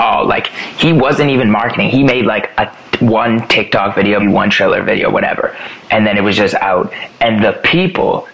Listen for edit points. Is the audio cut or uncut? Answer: cut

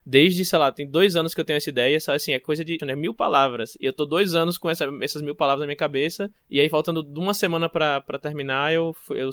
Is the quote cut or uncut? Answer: cut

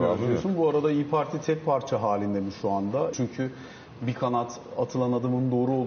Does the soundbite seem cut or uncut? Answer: cut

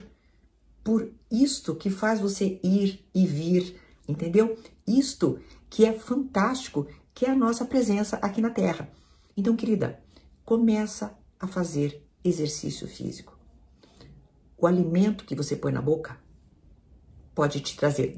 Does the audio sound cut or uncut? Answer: cut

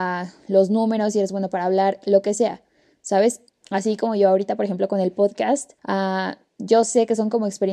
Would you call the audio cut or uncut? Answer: cut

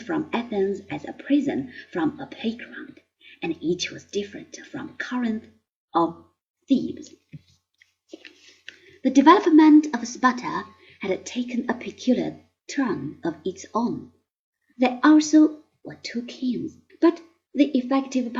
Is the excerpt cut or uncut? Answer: cut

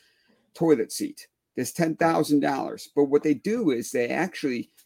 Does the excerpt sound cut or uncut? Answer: uncut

